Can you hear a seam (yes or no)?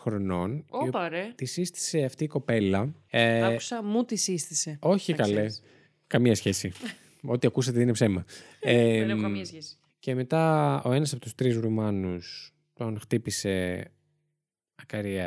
yes